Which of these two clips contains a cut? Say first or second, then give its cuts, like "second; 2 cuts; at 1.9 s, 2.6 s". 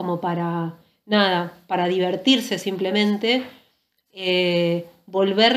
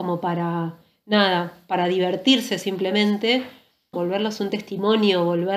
second; 1 cut; at 3.9 s